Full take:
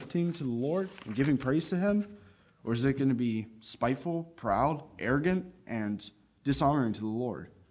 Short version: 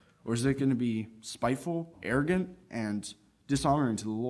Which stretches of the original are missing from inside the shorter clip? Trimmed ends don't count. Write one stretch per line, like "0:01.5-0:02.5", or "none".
0:04.3-0:04.9